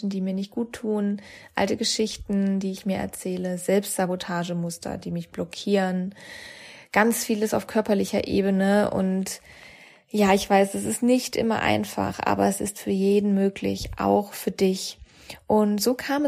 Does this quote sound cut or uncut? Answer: uncut